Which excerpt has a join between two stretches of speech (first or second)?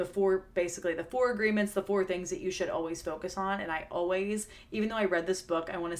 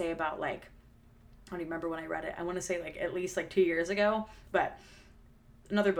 second